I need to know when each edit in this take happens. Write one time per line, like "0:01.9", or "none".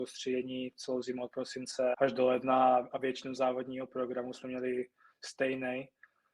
0:01.9

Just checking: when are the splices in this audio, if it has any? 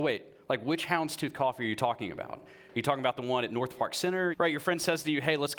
0:04.3

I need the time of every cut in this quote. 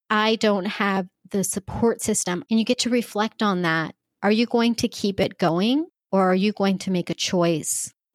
0:02.5

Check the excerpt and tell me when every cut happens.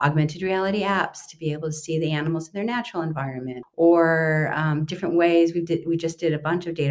0:03.6

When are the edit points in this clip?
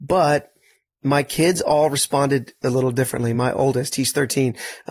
none

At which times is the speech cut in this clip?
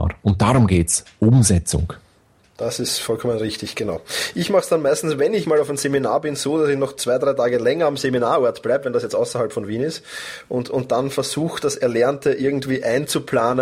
0:05.4

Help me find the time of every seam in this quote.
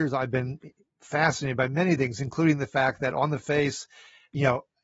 none

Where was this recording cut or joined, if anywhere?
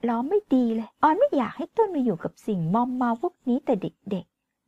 0:00.9

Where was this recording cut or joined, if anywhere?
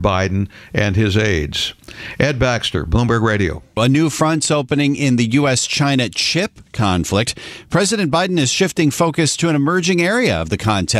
0:03.8

